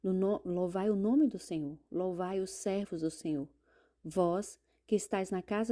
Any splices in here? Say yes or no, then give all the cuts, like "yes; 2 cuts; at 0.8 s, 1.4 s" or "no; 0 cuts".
no; 0 cuts